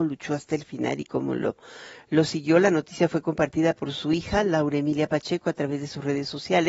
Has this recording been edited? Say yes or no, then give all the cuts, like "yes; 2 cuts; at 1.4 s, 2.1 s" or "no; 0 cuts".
no; 0 cuts